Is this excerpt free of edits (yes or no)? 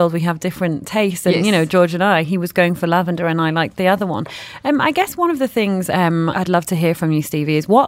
no